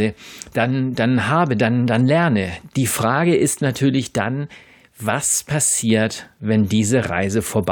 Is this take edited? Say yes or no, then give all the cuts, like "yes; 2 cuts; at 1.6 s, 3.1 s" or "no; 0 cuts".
no; 0 cuts